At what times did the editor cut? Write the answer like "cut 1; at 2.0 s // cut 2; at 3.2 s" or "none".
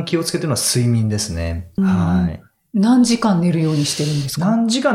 cut 1; at 1.8 s